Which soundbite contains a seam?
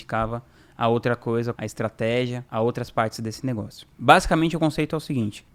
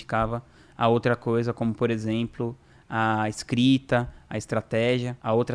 first; 1 cut; at 1.5 s

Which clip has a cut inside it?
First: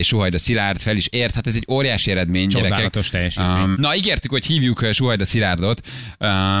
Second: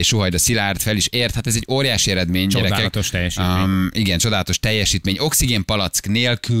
first; 1 cut; at 3.7 s

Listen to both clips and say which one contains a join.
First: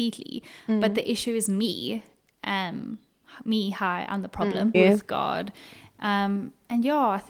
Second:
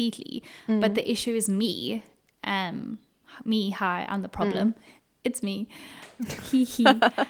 first; 1 cut; at 4.7 s

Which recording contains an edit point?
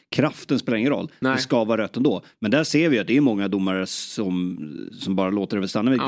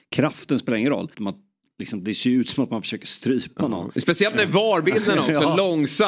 second; 1 cut; at 1.1 s

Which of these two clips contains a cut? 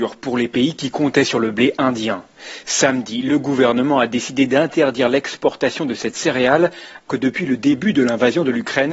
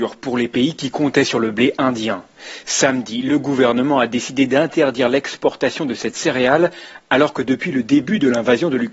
first; 1 cut; at 7.1 s

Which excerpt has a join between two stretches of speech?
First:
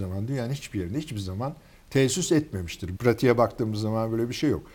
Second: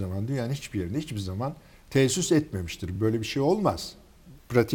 first; 1 cut; at 3.0 s

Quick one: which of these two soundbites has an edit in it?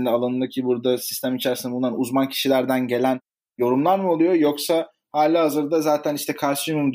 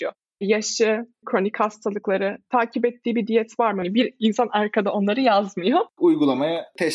second; 3 cuts; at 1.2 s, 3.8 s, 6.0 s

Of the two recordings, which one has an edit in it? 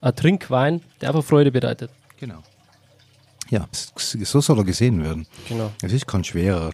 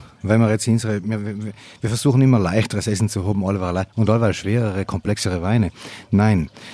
first; 1 cut; at 3.7 s

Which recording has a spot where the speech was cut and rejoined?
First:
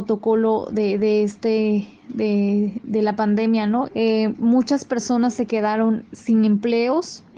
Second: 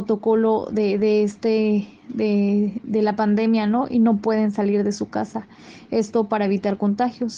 first; 1 cut; at 3.9 s

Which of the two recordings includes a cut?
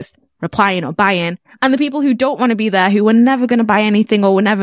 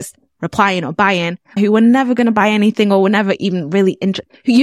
second; 1 cut; at 1.6 s

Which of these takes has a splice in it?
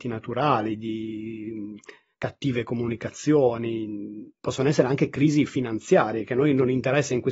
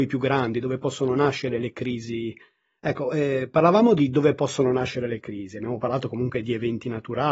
second; 1 cut; at 2.8 s

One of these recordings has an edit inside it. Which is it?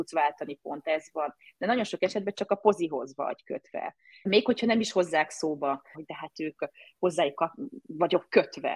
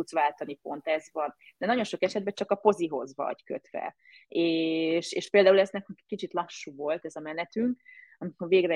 first; 2 cuts; at 4.3 s, 5.9 s

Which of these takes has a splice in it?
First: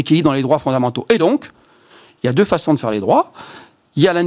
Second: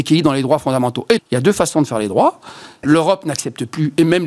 second; 2 cuts; at 1.2 s, 2.8 s

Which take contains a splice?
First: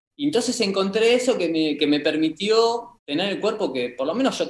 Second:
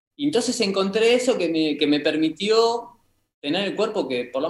first; 1 cut; at 3.0 s

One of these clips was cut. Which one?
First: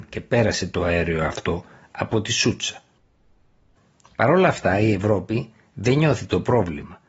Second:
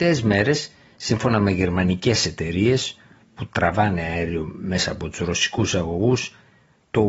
first; 1 cut; at 4.0 s

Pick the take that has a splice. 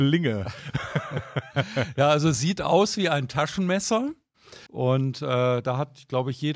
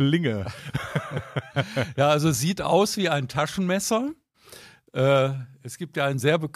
first; 1 cut; at 4.7 s

